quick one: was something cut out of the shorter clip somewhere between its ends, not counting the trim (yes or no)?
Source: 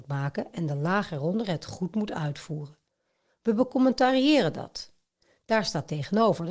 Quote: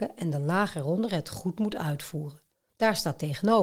yes